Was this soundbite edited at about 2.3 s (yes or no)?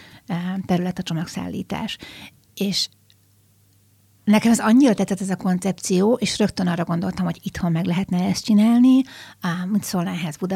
no